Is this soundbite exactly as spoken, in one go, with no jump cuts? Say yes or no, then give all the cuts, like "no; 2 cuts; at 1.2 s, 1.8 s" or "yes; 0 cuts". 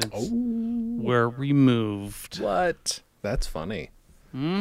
yes; 0 cuts